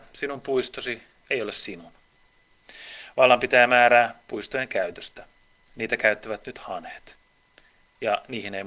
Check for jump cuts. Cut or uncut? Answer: uncut